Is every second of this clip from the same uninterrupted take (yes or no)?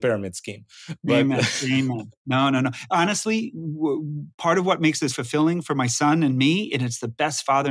no